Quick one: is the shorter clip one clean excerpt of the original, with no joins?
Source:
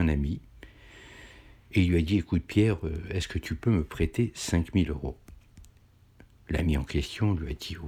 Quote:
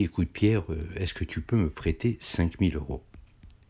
yes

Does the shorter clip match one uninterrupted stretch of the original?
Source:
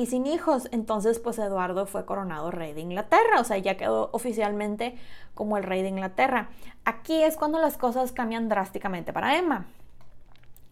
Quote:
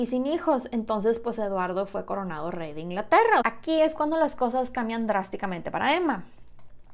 no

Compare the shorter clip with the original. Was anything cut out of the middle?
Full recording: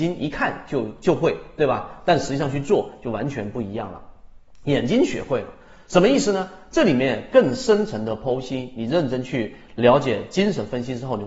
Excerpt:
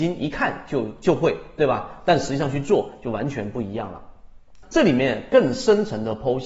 yes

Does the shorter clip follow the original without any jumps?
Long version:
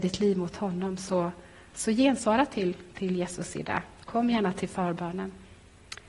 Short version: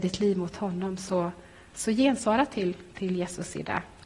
yes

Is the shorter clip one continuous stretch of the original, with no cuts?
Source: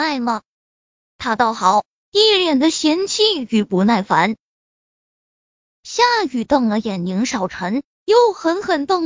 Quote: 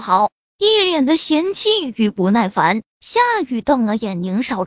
no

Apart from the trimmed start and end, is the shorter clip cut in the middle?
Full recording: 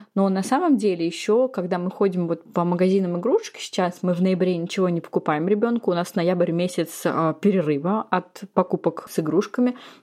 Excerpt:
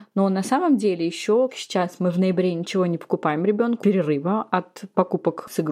yes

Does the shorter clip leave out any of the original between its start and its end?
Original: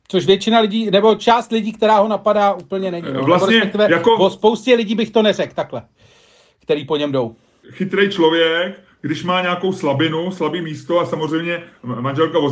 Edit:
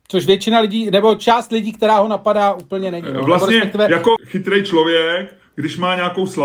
yes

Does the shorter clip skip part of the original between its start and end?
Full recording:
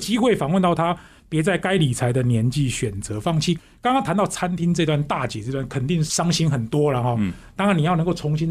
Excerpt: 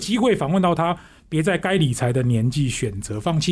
no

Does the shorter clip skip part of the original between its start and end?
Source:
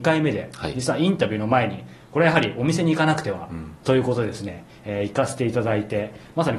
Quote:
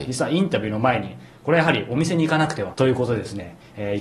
yes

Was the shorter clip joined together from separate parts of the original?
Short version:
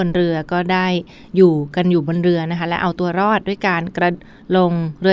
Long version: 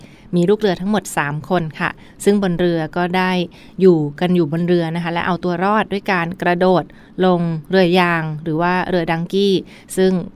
yes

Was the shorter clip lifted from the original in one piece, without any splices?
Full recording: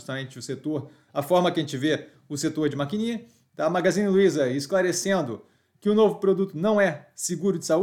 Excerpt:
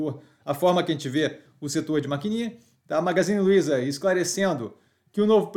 yes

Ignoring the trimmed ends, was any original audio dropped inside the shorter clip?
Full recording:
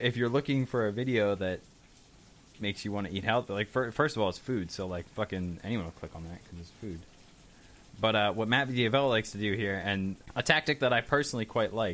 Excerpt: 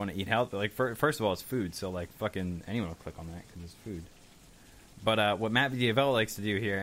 no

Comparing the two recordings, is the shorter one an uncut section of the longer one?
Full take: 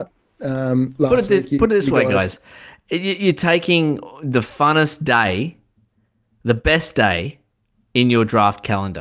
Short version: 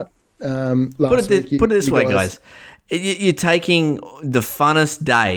yes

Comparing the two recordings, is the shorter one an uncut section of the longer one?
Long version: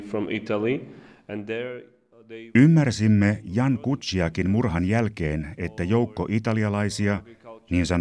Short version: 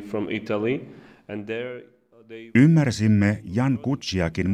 yes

